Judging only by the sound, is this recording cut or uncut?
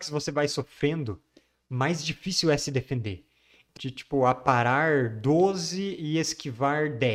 cut